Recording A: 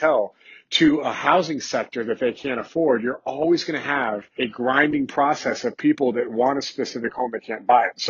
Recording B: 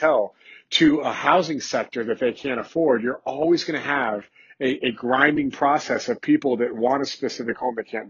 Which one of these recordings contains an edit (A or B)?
A